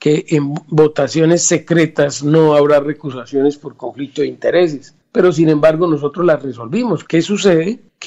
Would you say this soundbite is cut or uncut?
cut